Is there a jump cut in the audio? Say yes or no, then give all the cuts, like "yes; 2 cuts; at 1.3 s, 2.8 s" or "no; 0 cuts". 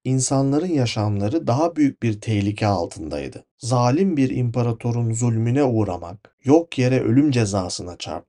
no; 0 cuts